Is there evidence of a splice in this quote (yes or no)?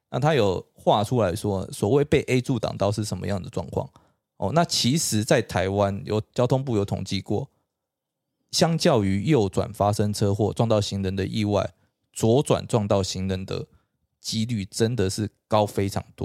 no